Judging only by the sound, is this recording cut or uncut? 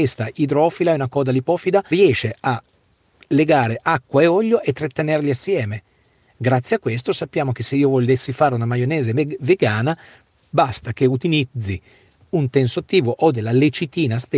cut